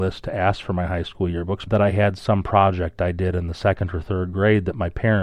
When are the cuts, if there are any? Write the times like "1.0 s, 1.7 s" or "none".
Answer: 1.7 s